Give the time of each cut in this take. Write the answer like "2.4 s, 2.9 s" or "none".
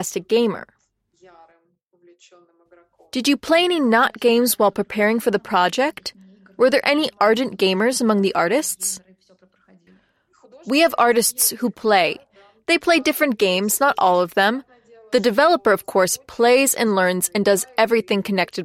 none

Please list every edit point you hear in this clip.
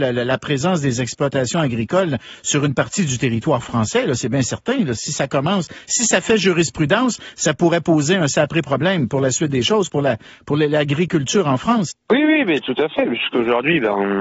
11.9 s

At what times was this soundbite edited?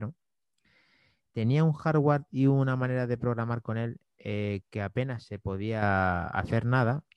none

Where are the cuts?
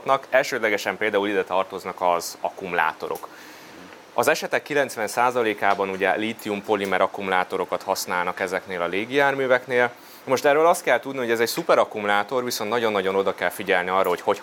none

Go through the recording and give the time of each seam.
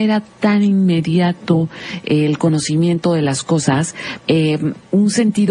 4.2 s

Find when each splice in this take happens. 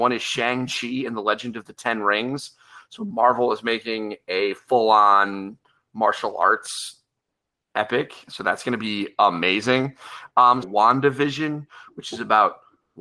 10.6 s

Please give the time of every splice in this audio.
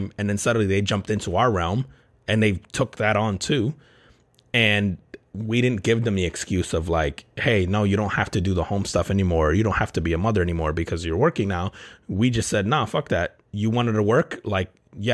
none

